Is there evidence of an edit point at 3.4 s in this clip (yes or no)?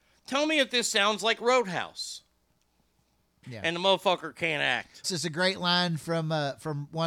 yes